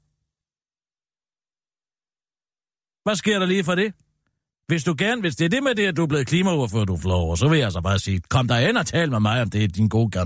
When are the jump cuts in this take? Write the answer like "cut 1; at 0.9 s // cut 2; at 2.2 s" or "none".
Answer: none